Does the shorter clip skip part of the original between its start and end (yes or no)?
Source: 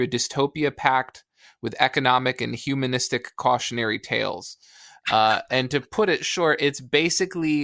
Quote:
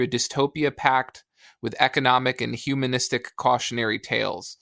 no